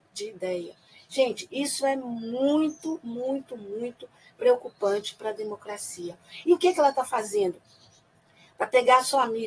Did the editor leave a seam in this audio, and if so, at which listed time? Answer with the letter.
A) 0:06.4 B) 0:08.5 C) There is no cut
A